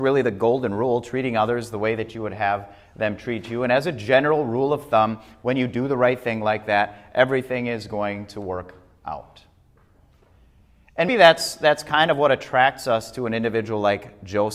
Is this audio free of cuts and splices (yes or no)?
no